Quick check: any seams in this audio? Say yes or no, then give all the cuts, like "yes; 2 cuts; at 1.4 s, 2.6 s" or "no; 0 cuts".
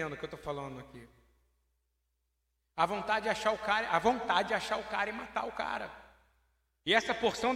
no; 0 cuts